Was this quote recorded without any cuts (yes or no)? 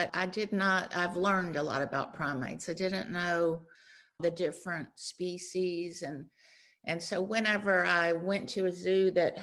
yes